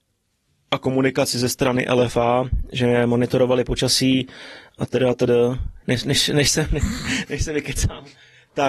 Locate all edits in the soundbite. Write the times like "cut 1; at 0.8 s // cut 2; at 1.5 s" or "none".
cut 1; at 5.8 s // cut 2; at 7.3 s